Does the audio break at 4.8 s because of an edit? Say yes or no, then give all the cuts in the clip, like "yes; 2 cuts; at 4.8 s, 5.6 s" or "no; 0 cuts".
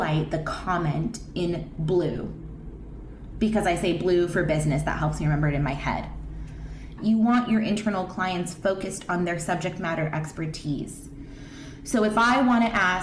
no; 1 cut; at 7.0 s